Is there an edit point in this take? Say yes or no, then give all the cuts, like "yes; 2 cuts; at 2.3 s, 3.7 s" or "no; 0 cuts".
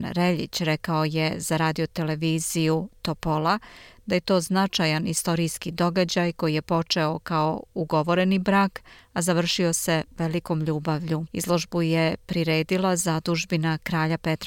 yes; 1 cut; at 11.3 s